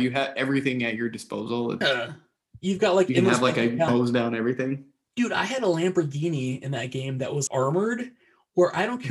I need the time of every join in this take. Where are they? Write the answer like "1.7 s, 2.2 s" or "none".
1.8 s, 3.9 s, 7.5 s